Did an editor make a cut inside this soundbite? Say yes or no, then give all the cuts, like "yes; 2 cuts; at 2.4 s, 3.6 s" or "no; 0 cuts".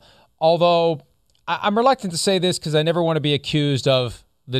no; 0 cuts